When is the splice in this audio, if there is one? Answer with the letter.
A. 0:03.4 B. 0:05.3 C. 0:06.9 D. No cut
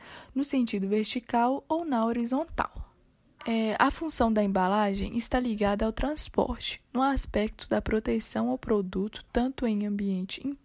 A